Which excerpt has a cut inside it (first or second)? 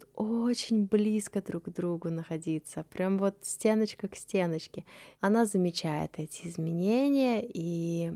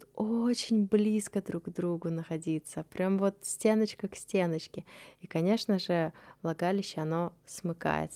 first